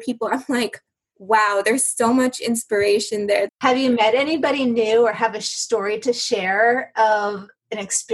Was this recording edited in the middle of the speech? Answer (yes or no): yes